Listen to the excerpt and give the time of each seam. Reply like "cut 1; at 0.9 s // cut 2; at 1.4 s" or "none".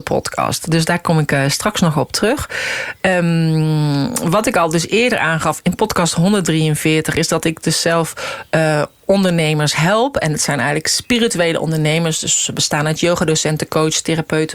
none